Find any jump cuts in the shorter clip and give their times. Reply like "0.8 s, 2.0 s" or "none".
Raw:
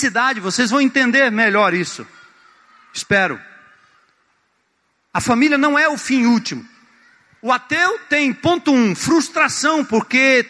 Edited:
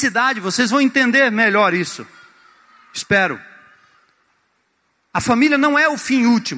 none